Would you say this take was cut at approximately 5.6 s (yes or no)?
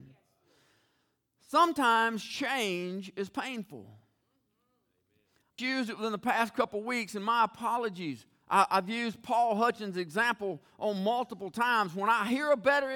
yes